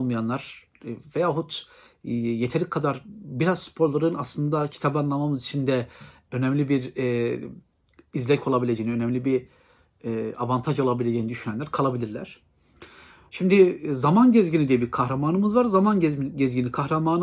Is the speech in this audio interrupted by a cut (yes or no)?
no